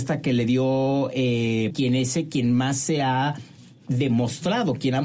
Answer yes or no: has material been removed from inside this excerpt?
yes